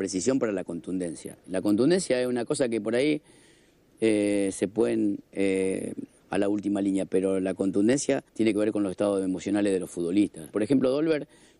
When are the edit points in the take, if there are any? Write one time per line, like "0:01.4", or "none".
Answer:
0:06.2
0:08.3
0:10.5